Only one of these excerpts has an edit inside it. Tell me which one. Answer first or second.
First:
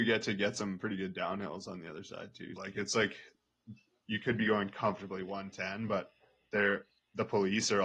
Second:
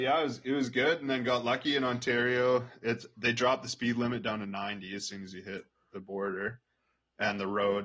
first